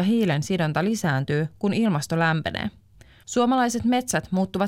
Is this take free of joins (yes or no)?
no